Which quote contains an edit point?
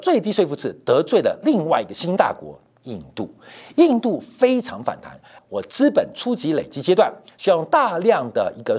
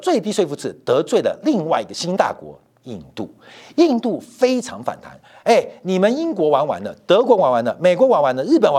first; 1 cut; at 5.4 s

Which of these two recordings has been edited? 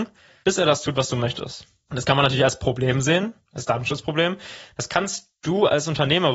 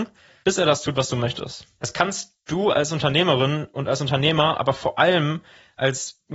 second; 1 cut; at 1.8 s

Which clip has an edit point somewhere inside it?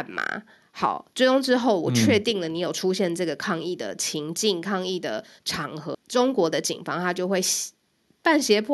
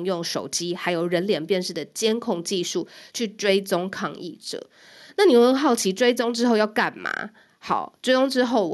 first; 1 cut; at 5.9 s

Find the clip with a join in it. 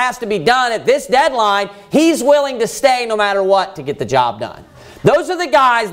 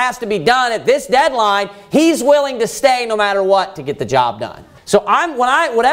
second; 1 cut; at 4.8 s

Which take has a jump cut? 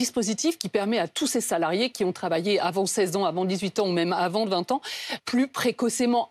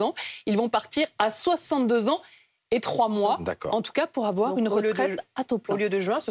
first; 1 cut; at 5.2 s

